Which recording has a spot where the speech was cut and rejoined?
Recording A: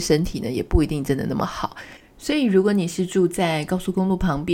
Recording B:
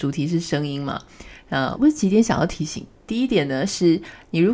B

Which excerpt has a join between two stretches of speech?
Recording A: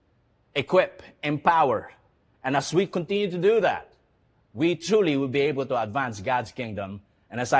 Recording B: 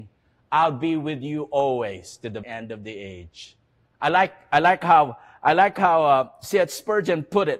B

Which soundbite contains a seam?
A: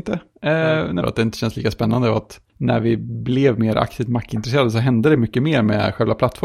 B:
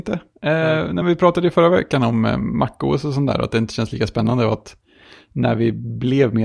A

